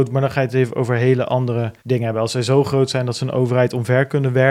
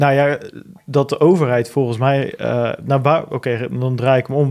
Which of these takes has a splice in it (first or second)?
first